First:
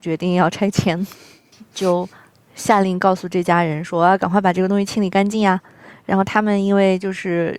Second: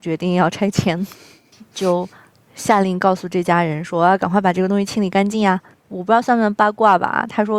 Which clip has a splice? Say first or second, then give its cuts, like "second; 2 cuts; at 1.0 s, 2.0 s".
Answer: second; 1 cut; at 5.7 s